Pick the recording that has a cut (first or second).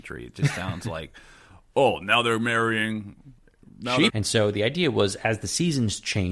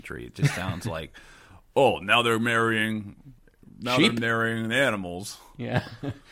first